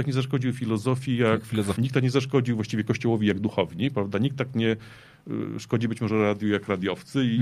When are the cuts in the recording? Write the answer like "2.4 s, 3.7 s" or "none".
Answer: 1.8 s